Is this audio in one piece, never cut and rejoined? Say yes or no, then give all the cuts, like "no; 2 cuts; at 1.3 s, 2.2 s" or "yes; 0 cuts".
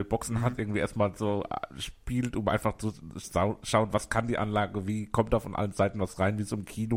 yes; 0 cuts